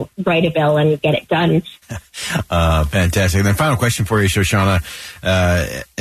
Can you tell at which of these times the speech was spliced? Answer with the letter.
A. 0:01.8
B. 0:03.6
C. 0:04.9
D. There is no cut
A